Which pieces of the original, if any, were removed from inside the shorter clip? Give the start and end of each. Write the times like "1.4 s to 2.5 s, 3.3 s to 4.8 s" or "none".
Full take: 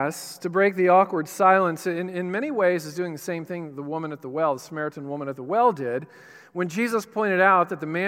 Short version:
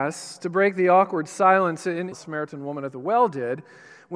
2.1 s to 4.6 s